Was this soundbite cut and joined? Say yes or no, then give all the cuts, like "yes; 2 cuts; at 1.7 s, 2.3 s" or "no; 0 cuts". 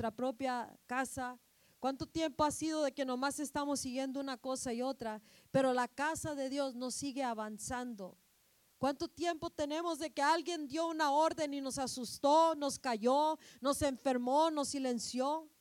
no; 0 cuts